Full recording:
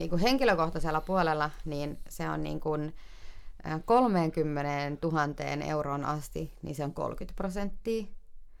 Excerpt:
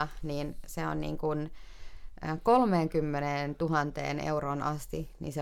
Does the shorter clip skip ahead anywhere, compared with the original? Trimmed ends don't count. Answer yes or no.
no